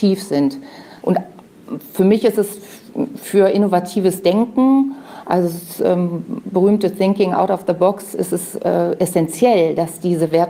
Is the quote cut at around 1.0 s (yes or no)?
yes